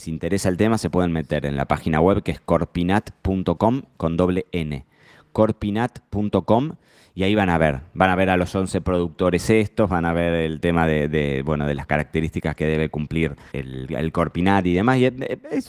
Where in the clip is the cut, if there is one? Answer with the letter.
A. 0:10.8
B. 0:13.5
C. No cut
B